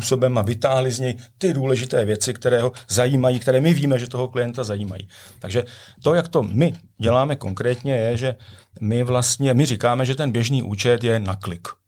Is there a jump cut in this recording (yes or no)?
no